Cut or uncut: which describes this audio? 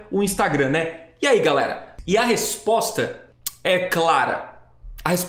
uncut